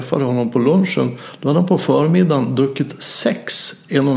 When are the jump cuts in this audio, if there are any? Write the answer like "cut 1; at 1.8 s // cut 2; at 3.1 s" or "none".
none